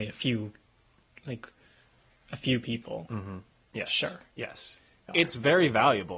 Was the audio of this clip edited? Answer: yes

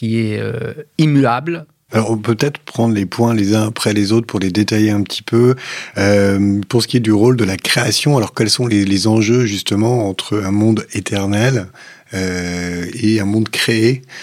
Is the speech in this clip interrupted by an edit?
yes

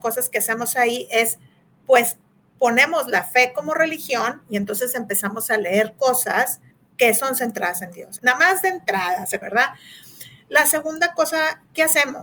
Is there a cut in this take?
yes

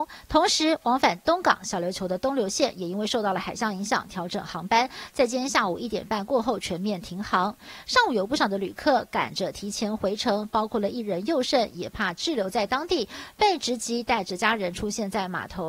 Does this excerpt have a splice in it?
no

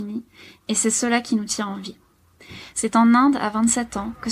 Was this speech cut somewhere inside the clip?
no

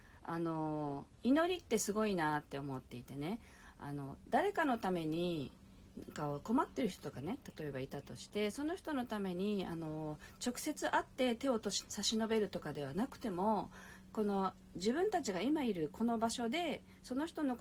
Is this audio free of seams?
no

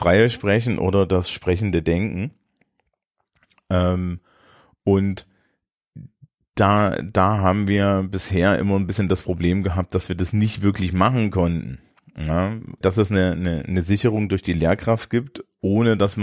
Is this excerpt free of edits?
no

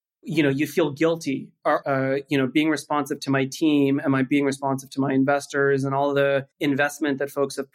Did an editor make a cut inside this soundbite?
yes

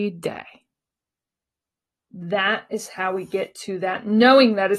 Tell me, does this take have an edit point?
yes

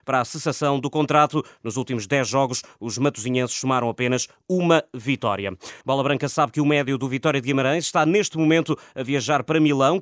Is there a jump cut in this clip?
yes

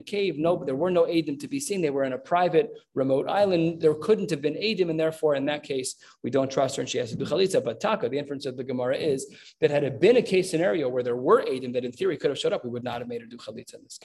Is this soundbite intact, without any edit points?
yes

